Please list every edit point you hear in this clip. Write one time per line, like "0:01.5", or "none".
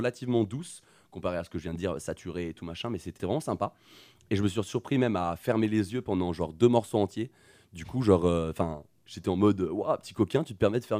0:03.2